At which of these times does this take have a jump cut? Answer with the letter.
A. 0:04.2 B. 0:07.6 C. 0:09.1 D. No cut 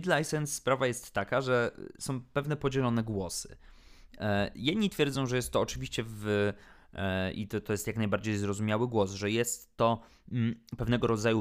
D